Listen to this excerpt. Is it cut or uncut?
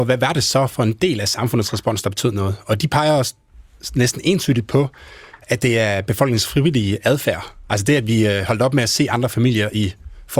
uncut